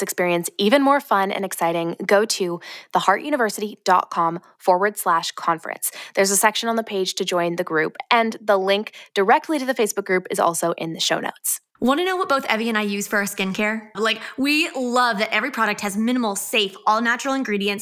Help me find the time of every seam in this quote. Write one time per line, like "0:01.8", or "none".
0:11.8
0:13.9